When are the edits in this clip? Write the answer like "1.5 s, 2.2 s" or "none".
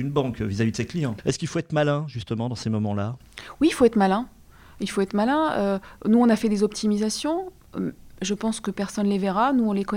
1.2 s